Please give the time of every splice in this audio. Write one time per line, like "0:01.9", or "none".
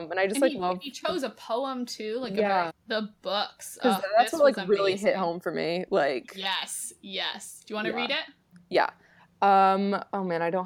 0:02.7